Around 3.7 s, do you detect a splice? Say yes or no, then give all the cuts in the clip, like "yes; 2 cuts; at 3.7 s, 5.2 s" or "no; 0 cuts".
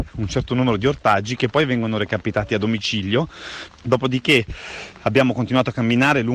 yes; 1 cut; at 3.7 s